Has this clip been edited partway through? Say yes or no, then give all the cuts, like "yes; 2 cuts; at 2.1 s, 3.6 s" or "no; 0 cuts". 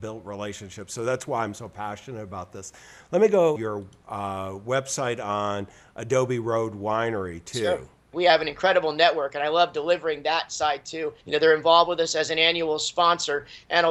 yes; 3 cuts; at 3.6 s, 8.1 s, 11.2 s